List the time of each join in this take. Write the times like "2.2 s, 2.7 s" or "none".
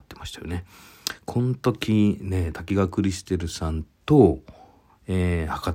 none